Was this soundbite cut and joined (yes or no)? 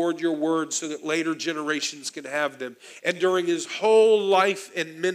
yes